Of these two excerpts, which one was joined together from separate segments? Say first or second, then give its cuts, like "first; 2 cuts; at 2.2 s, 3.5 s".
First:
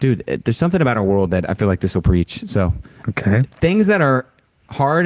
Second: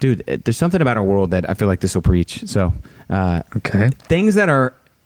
first; 1 cut; at 3.0 s